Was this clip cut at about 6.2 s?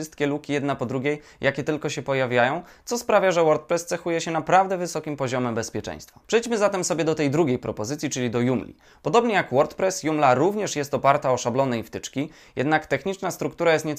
yes; 1 cut; at 6.2 s

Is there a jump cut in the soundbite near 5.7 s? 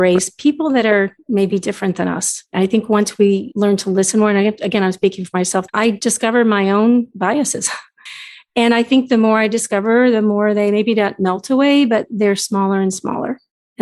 yes; 2 cuts; at 5.7 s, 8.1 s

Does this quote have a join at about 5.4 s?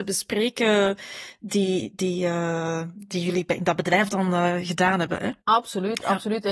yes; 1 cut; at 5.4 s

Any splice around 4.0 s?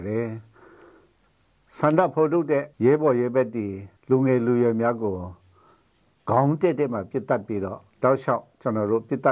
yes; 3 cuts; at 2.7 s, 4.0 s, 7.9 s

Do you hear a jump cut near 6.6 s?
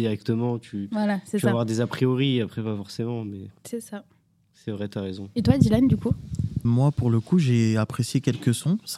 yes; 1 cut; at 6.6 s

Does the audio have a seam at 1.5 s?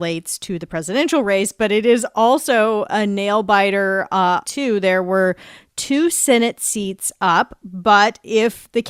no; 1 cut; at 4.4 s

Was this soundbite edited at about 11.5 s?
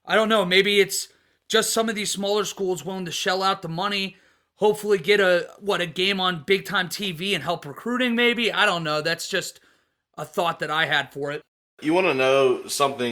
no; 0 cuts

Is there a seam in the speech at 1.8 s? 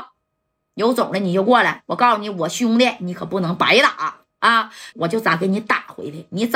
no; 1 cut; at 4.9 s

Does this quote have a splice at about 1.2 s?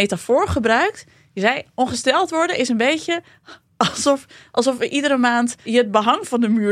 no; 1 cut; at 5.6 s

